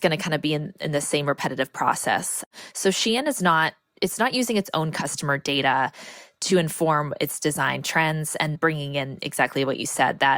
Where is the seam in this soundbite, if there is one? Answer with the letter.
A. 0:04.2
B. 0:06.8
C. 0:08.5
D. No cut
C